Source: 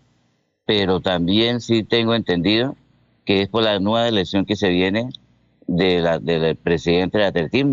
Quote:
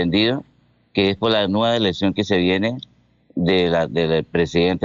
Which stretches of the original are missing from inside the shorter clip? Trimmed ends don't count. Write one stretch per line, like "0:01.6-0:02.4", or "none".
none